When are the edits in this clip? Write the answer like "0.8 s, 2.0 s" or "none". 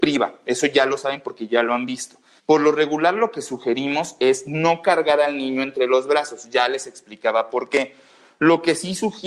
2.4 s

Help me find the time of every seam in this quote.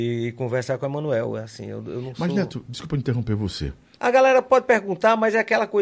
4.0 s

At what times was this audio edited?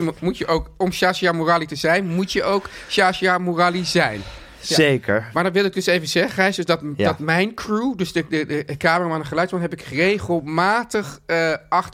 none

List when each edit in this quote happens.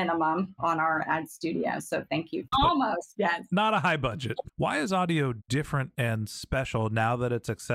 2.5 s, 4.5 s

